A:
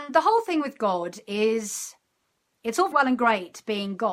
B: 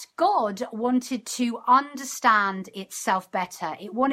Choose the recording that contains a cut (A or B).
A